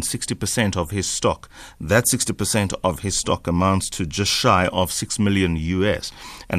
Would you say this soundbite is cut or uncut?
uncut